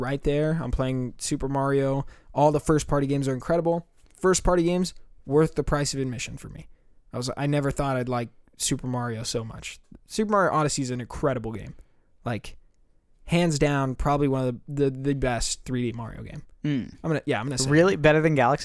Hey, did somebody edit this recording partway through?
no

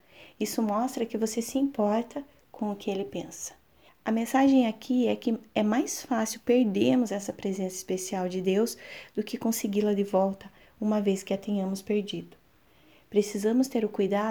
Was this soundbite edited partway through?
yes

